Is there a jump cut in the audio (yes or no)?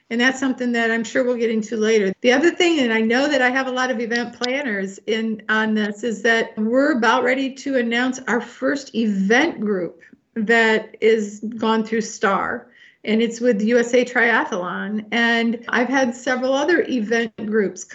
yes